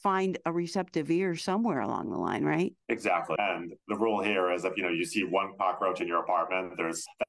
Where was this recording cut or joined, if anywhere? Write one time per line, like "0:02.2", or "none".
0:03.4